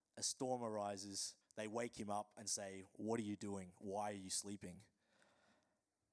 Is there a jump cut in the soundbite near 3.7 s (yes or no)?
no